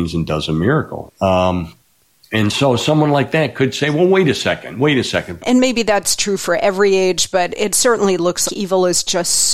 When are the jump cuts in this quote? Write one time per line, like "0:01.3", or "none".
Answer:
0:01.1
0:05.4
0:08.5